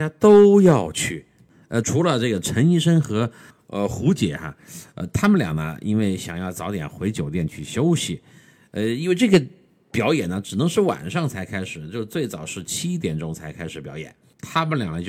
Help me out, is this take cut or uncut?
cut